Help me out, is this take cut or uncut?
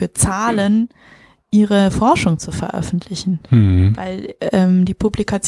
uncut